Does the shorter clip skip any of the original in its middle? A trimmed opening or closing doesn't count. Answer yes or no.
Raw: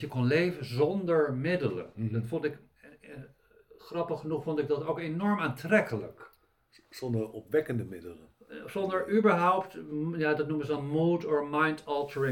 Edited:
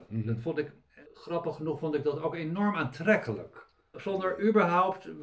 yes